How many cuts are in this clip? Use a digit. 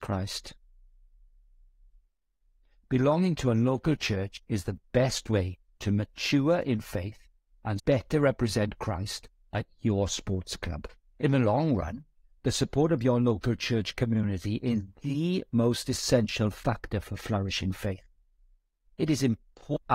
2